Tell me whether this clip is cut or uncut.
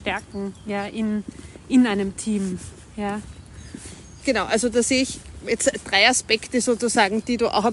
cut